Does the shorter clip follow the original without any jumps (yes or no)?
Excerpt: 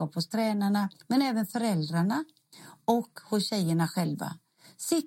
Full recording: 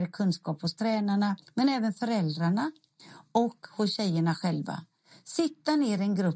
yes